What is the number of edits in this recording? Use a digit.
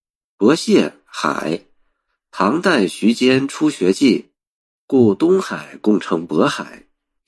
1